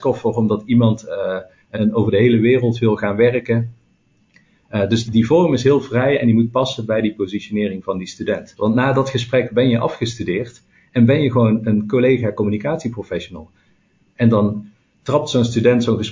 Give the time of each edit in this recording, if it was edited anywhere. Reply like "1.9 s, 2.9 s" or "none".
1.7 s, 5.0 s, 8.6 s